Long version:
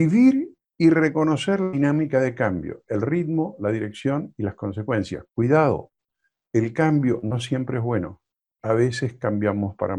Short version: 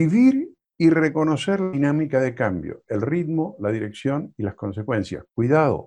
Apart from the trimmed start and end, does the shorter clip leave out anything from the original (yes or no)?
no